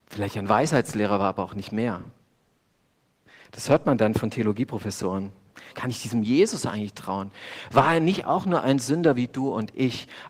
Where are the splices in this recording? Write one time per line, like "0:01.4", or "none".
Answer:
0:05.7